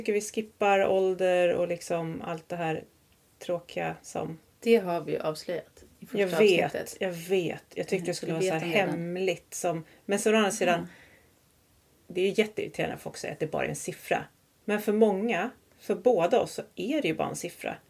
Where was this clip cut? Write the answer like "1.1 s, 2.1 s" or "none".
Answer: none